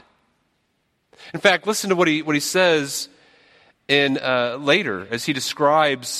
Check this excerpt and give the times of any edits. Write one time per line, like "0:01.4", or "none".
none